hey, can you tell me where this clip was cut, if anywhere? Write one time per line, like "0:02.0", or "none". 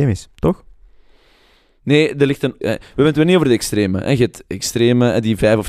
0:02.6

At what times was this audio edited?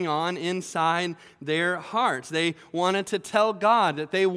none

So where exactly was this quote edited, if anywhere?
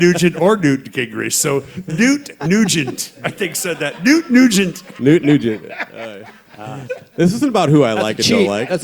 none

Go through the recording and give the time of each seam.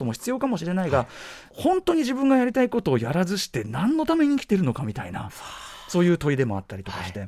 0:01.5

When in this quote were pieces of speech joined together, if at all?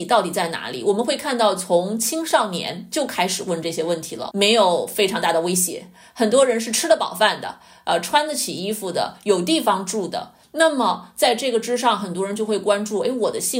0:04.3

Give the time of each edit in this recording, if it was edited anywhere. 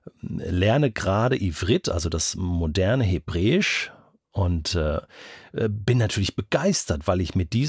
none

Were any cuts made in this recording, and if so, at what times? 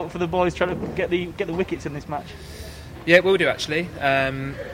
none

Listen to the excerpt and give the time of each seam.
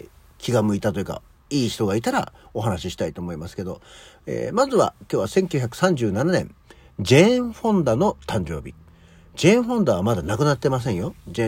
none

